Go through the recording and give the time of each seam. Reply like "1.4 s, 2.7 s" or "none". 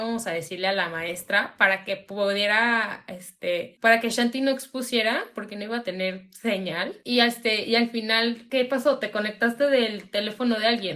none